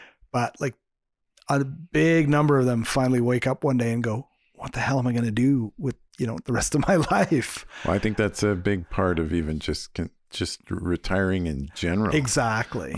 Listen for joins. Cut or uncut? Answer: uncut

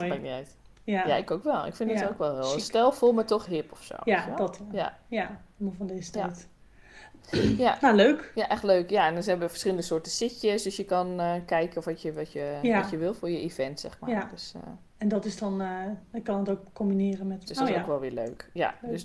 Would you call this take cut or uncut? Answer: cut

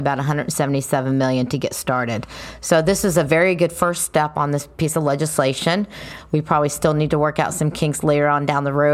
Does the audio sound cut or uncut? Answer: uncut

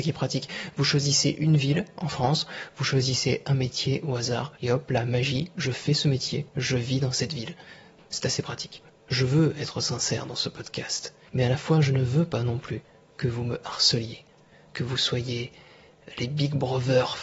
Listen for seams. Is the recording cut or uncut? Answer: cut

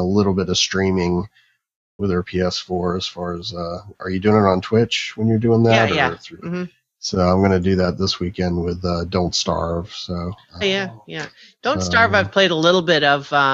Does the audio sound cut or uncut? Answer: cut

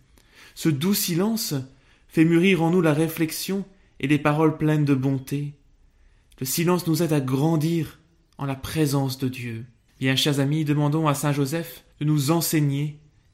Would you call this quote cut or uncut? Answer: cut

